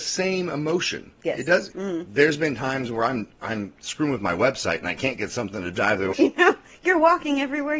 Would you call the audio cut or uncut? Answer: cut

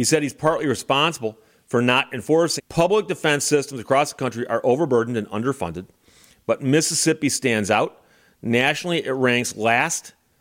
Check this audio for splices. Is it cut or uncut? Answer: cut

